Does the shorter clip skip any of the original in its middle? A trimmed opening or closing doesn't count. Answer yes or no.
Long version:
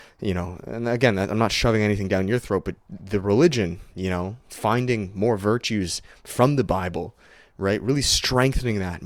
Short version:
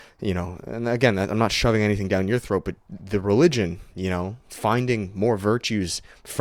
no